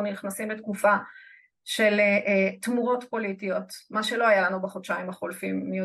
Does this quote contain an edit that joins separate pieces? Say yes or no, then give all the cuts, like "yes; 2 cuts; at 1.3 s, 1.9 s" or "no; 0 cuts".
no; 0 cuts